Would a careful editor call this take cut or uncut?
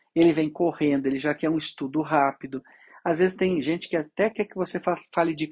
uncut